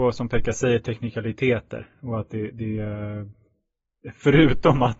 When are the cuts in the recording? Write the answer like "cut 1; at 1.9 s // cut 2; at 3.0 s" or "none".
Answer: none